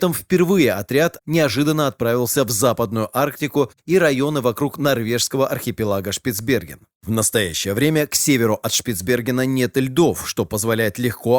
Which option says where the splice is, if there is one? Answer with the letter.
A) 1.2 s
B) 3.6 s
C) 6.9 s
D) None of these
A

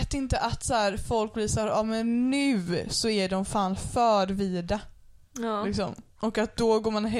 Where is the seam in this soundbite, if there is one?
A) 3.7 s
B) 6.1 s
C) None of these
B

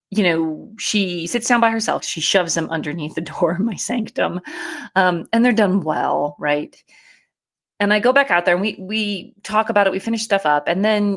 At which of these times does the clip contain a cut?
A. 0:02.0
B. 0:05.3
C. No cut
A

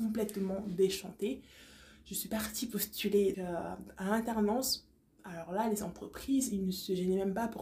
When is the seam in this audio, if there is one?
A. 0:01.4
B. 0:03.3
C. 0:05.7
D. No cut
B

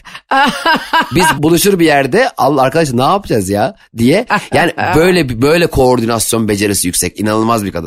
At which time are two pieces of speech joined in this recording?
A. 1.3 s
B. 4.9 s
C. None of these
A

